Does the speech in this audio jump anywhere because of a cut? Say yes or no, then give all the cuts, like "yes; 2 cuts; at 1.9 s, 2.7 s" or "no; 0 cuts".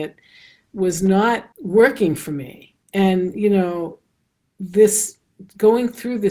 yes; 2 cuts; at 1.5 s, 2.8 s